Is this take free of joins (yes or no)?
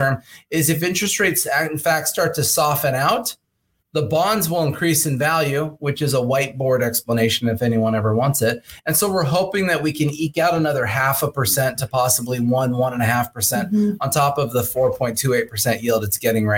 yes